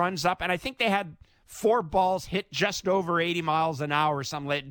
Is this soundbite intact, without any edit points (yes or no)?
yes